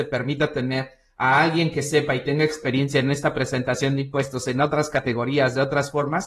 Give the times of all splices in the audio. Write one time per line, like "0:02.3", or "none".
none